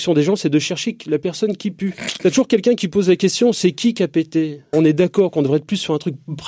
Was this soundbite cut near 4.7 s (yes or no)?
yes